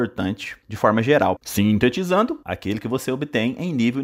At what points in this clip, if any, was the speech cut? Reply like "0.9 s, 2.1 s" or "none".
1.4 s, 2.4 s